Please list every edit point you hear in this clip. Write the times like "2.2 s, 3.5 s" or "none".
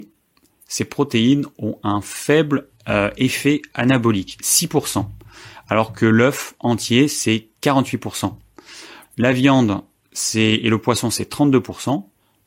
9.0 s